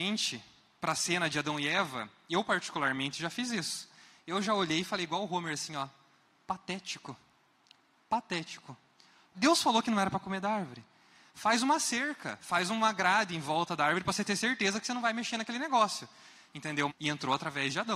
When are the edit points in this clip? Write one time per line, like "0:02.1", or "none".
0:09.3
0:16.9